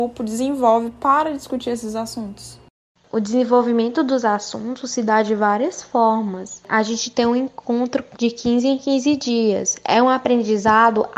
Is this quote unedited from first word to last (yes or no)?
yes